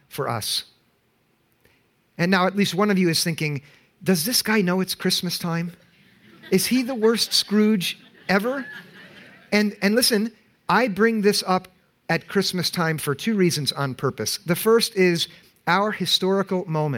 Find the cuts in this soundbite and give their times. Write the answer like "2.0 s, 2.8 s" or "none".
none